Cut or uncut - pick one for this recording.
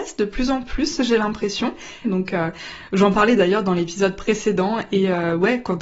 cut